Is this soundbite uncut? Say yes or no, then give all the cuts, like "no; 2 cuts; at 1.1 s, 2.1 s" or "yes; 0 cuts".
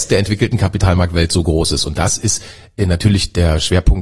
yes; 0 cuts